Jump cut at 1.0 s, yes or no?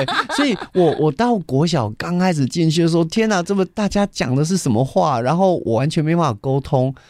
yes